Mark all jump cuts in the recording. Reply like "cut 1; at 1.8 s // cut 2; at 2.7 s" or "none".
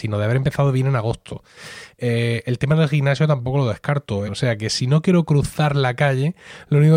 cut 1; at 1.9 s // cut 2; at 4.3 s